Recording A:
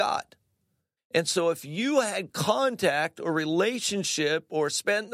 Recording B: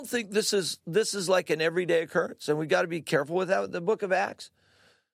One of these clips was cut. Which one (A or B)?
A